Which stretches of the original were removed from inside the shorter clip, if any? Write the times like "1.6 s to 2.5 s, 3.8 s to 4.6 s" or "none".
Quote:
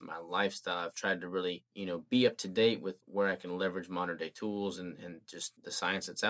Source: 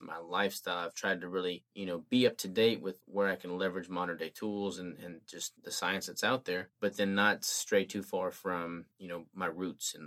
none